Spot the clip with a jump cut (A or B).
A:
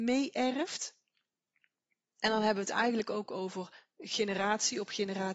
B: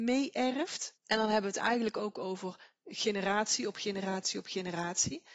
B